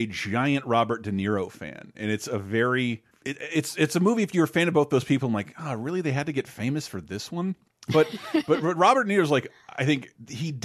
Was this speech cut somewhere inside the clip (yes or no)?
no